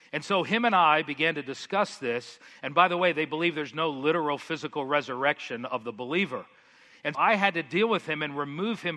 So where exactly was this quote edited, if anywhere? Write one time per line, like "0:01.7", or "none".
0:07.1